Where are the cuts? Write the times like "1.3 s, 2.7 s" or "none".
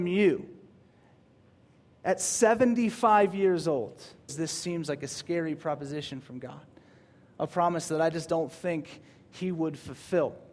4.3 s